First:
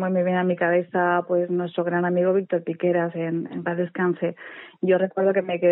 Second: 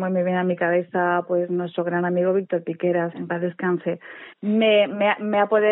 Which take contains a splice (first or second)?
second